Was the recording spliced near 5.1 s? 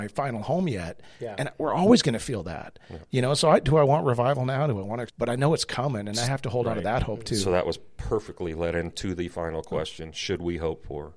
yes; 1 cut; at 5.1 s

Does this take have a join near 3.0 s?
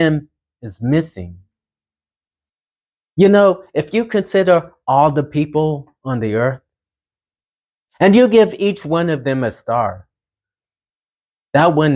yes; 1 cut; at 3.0 s

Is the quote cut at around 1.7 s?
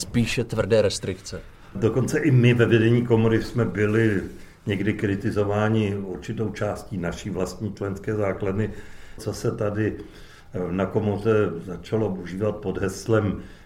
yes; 2 cuts; at 1.7 s, 9.2 s

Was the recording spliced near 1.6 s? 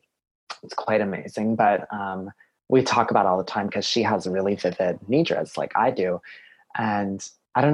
no; 0 cuts

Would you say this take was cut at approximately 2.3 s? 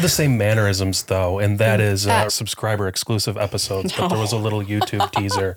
yes; 1 cut; at 2.3 s

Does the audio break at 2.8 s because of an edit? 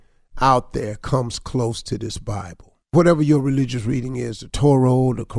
yes; 1 cut; at 2.8 s

